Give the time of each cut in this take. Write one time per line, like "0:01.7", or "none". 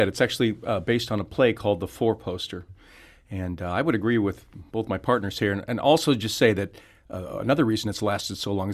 none